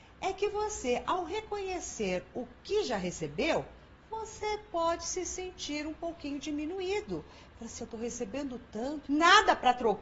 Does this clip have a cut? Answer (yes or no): yes